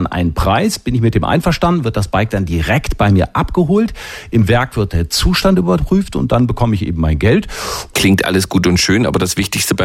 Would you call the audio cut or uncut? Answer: cut